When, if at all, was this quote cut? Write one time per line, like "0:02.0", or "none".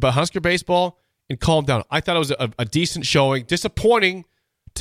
none